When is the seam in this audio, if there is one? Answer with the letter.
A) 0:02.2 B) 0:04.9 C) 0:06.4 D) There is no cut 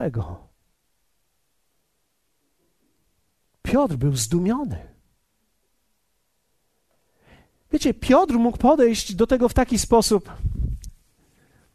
D